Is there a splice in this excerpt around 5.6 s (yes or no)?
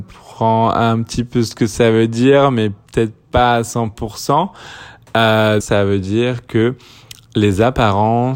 yes